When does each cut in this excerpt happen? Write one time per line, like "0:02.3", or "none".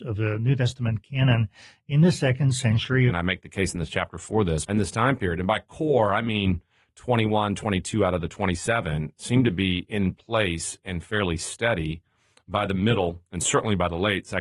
0:03.1
0:04.7